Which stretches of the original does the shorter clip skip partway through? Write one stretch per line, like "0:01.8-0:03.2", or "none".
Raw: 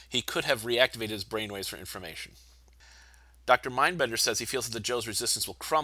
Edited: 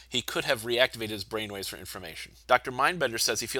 0:02.4-0:03.4